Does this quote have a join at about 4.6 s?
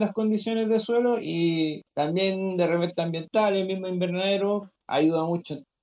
no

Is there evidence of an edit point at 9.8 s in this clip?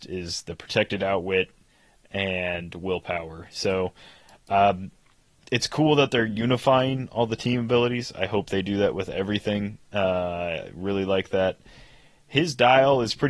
yes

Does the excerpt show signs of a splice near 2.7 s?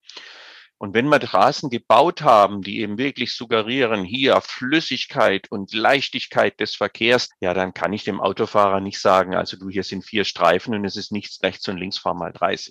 no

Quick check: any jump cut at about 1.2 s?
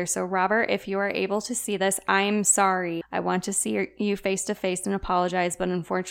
no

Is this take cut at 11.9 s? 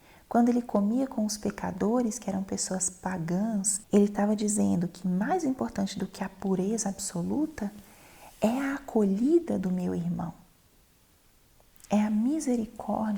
no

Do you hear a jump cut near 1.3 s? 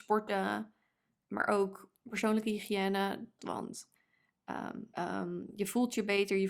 no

